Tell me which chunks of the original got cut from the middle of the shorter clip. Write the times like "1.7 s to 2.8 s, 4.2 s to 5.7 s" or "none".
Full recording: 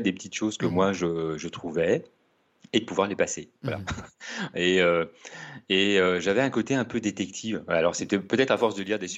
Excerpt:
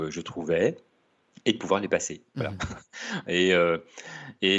none